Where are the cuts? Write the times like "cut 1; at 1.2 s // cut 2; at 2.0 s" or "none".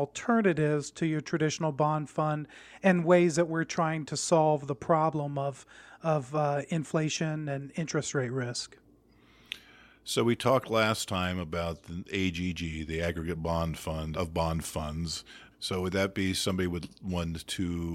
cut 1; at 14.1 s // cut 2; at 15.5 s